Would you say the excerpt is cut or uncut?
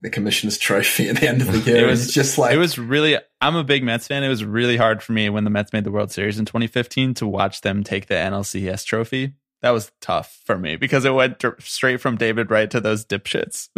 uncut